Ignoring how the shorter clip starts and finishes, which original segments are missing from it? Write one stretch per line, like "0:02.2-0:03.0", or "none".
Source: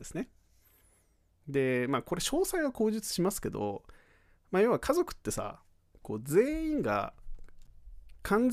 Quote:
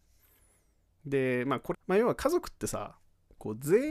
0:02.2-0:04.4